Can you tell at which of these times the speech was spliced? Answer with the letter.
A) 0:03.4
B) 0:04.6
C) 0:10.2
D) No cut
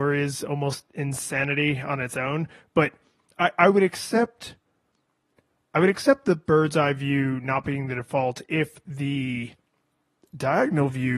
D